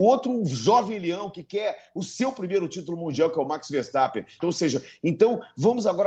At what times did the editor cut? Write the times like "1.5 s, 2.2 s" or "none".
4.4 s